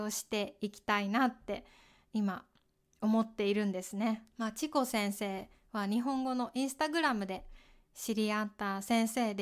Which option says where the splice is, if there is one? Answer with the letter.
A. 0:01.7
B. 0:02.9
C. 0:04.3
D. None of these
C